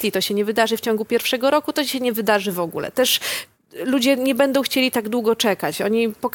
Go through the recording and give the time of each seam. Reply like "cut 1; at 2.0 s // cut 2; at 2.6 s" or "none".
none

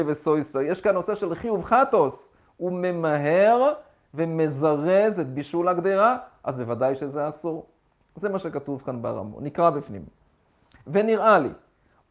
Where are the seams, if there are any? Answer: none

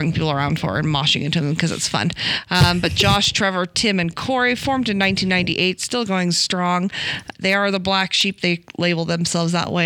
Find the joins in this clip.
none

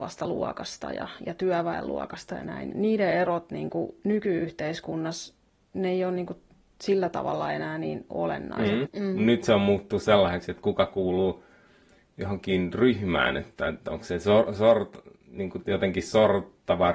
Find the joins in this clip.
cut 1; at 2.7 s // cut 2; at 8.8 s

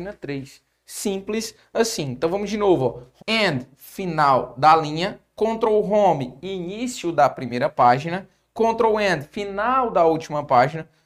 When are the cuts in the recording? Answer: cut 1; at 3.2 s

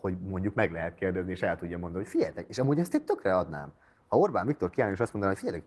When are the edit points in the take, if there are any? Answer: none

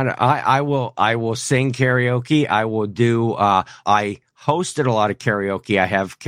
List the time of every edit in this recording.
cut 1; at 3.8 s

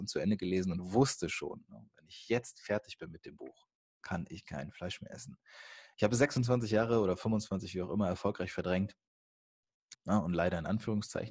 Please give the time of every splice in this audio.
cut 1; at 9.9 s

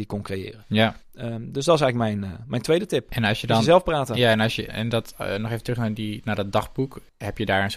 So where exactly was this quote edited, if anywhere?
cut 1; at 4.7 s

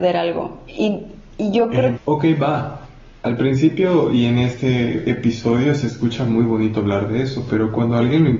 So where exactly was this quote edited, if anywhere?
cut 1; at 2.0 s

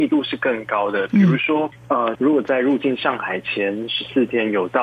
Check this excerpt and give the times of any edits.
cut 1; at 2.2 s

